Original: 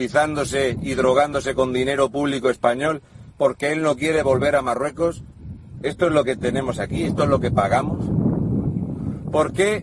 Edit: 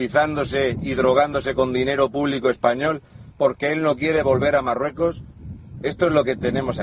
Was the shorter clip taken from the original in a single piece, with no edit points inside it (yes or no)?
yes